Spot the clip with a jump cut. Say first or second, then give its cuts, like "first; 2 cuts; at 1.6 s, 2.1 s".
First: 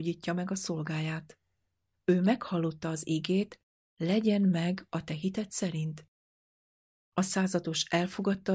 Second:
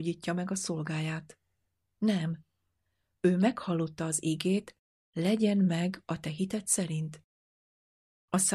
first; 1 cut; at 1.9 s